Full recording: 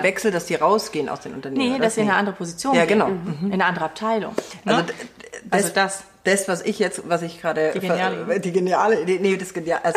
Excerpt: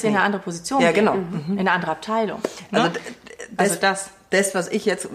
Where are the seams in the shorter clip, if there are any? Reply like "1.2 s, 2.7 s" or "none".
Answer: none